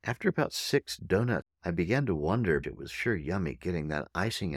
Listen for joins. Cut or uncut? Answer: cut